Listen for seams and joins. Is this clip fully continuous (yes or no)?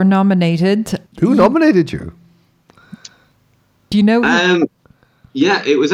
yes